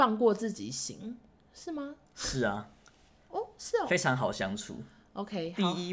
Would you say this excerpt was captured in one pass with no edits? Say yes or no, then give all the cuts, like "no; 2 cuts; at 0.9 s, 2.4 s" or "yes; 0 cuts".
yes; 0 cuts